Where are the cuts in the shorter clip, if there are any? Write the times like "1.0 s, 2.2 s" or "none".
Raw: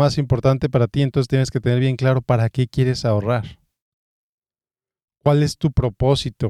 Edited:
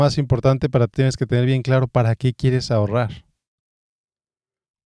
0.9 s